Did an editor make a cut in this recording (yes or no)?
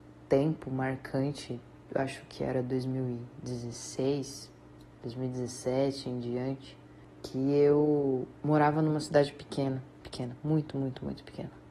yes